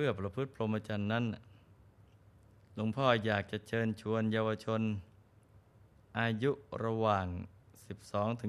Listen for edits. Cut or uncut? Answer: uncut